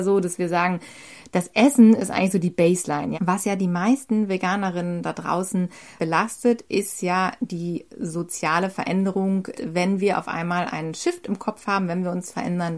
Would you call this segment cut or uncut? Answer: cut